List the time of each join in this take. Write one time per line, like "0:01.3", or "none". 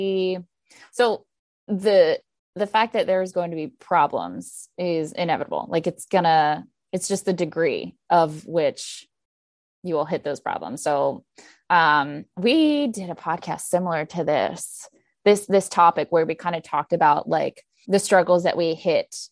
0:17.8